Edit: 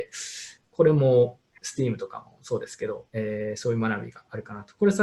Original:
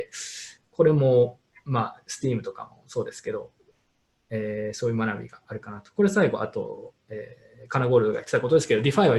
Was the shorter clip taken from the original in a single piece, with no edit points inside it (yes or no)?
no